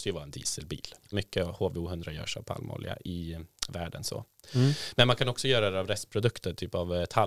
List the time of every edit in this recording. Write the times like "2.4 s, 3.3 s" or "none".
1.1 s